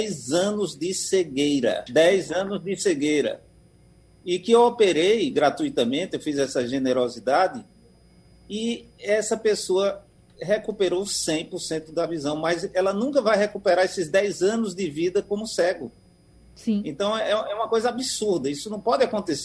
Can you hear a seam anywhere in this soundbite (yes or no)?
yes